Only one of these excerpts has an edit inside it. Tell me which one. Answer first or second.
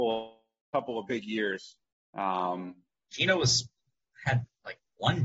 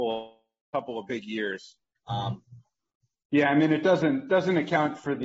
second